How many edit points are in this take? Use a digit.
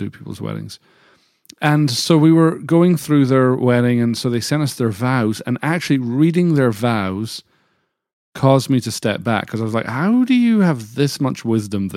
0